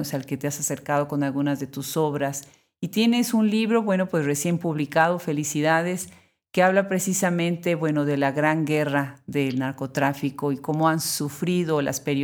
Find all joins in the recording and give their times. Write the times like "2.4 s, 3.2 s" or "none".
none